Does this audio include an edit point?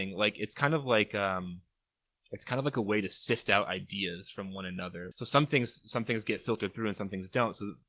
yes; 1 cut; at 5.1 s

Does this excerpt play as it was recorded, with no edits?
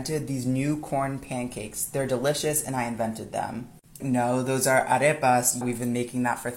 no; 2 cuts; at 4.0 s, 5.6 s

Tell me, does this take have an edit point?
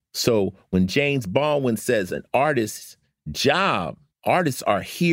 no; 0 cuts

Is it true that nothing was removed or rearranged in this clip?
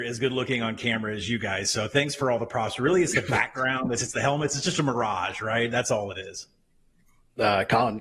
no; 1 cut; at 4.0 s

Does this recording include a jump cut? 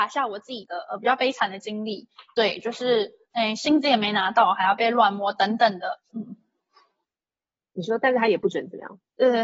yes; 1 cut; at 6.1 s

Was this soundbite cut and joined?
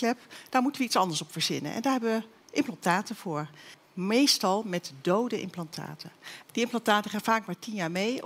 yes; 2 cuts; at 3.8 s, 6.4 s

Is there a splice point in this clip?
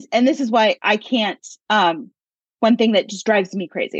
no; 0 cuts

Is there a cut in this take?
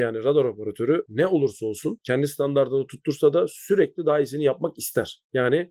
no; 0 cuts

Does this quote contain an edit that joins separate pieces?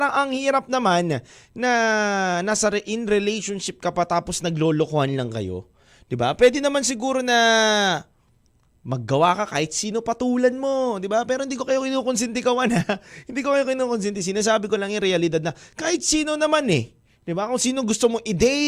no; 0 cuts

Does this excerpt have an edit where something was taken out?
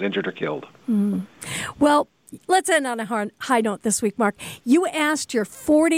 no; 0 cuts

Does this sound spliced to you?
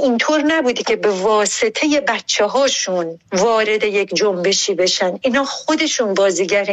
yes; 1 cut; at 3.3 s

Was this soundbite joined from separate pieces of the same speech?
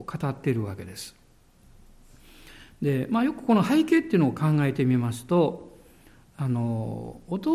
no; 0 cuts

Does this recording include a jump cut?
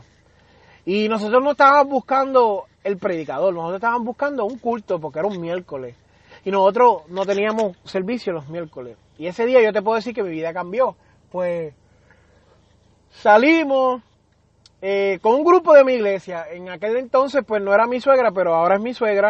no; 0 cuts

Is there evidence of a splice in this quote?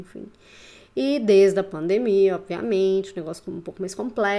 no; 0 cuts

